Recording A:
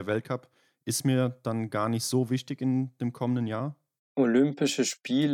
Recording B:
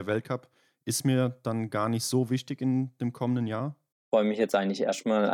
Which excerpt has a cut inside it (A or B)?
B